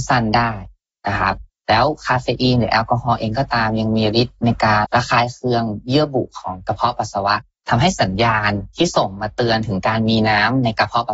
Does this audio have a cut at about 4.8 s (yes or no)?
yes